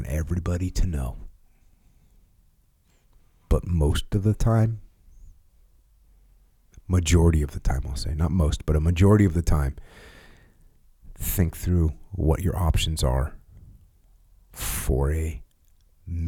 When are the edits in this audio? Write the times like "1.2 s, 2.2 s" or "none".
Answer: none